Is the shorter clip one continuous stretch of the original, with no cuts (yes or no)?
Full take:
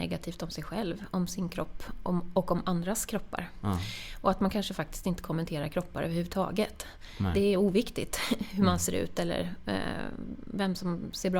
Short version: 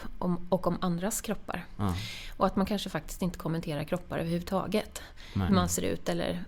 no